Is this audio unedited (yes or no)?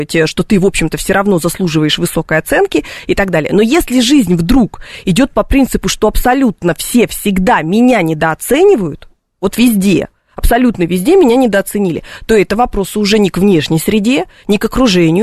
yes